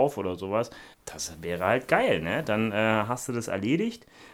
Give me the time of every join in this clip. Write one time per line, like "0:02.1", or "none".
0:00.9